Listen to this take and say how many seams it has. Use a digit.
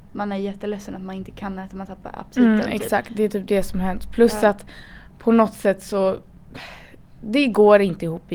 0